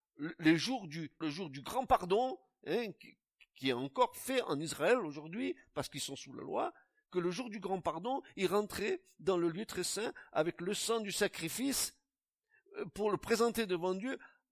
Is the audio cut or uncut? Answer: cut